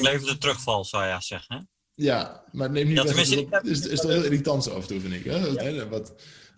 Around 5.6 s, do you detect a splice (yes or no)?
yes